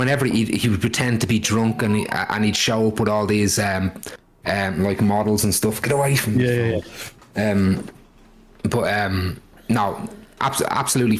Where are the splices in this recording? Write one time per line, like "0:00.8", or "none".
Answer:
none